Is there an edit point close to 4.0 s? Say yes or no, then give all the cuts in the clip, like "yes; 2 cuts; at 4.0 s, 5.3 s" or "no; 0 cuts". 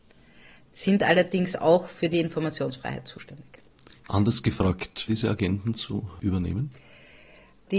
yes; 2 cuts; at 4.0 s, 5.1 s